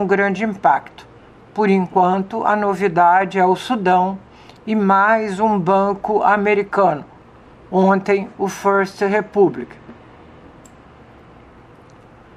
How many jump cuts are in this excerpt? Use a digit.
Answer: 0